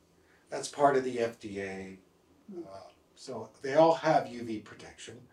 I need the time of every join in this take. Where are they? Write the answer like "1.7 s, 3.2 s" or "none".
none